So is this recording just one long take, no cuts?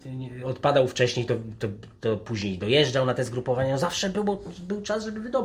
yes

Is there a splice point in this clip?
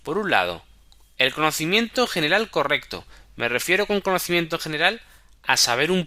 no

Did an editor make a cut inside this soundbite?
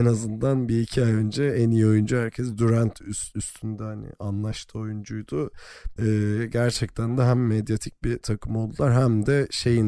yes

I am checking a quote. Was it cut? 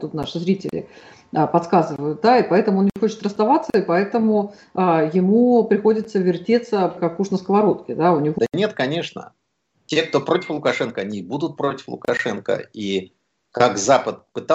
yes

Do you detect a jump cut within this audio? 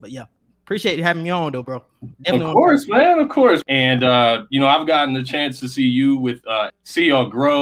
yes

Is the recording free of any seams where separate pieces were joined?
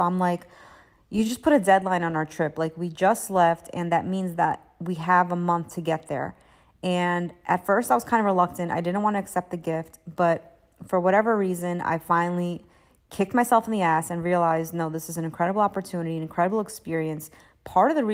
yes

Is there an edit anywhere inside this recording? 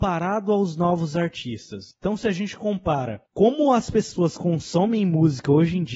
yes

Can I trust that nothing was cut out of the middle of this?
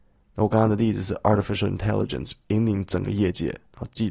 no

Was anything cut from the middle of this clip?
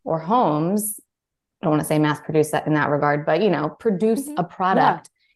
no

